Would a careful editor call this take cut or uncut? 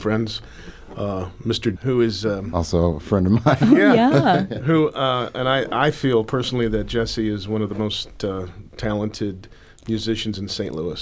cut